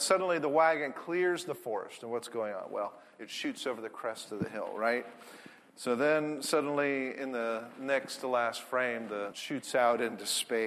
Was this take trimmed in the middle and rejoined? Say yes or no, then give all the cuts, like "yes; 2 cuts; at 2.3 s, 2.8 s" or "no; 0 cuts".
yes; 2 cuts; at 5.6 s, 9.3 s